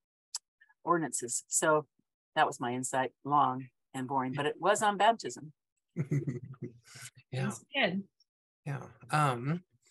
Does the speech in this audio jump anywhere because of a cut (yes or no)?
no